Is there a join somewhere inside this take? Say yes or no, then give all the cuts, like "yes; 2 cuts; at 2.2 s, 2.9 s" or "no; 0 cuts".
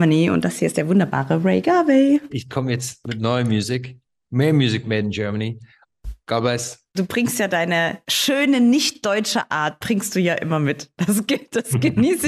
yes; 1 cut; at 2.3 s